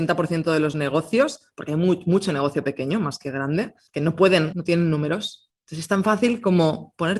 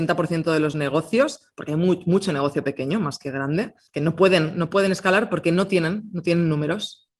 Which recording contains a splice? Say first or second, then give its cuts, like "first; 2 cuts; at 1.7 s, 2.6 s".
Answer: first; 1 cut; at 4.5 s